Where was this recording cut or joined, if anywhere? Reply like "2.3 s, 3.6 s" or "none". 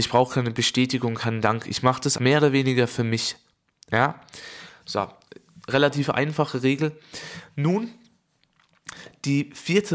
2.2 s